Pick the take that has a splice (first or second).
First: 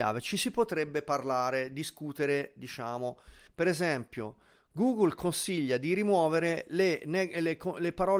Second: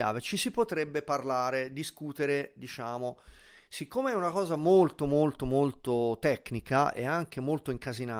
first